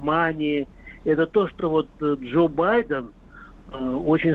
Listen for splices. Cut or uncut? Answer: uncut